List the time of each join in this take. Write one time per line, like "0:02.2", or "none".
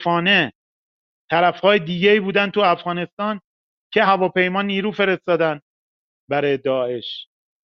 0:04.1